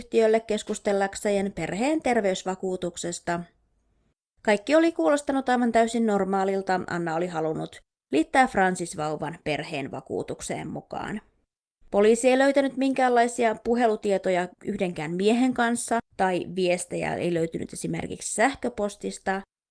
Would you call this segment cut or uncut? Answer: cut